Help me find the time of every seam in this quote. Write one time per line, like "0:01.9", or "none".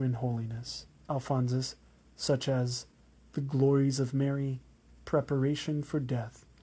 0:01.1